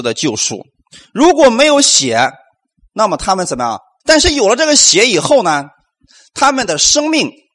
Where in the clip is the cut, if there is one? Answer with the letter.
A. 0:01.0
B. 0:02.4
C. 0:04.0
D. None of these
C